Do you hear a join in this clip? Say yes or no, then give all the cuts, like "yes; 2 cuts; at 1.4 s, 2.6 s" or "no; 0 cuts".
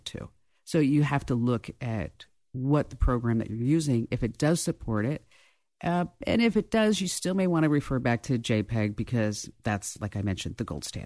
no; 0 cuts